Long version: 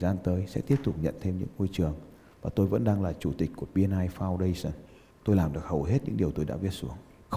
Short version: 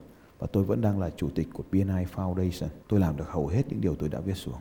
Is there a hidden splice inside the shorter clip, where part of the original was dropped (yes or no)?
yes